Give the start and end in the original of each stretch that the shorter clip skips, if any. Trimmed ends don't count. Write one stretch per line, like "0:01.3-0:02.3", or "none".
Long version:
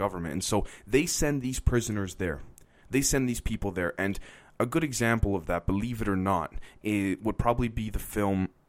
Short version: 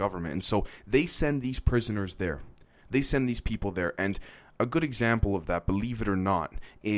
none